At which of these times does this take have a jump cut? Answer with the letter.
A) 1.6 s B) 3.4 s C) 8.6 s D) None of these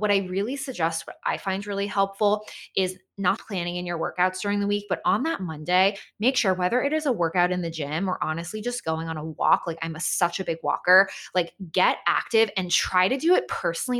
B